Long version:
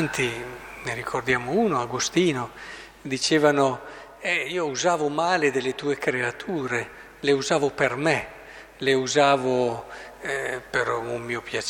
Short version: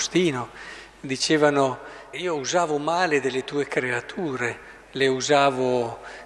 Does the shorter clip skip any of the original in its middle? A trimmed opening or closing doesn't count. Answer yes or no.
yes